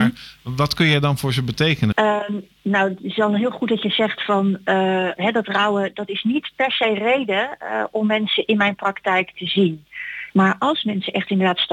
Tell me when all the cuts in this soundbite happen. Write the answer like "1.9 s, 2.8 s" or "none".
1.9 s, 5.2 s, 10.3 s